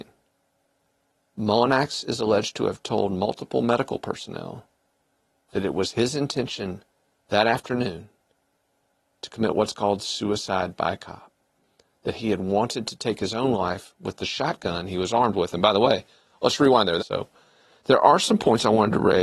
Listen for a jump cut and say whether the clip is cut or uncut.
cut